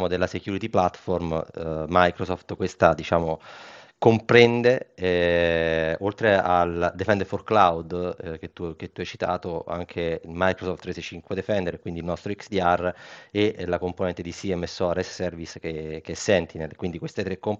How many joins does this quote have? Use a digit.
0